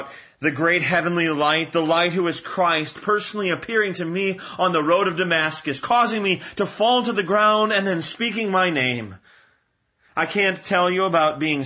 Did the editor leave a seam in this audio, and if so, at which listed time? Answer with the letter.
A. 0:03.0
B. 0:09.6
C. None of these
C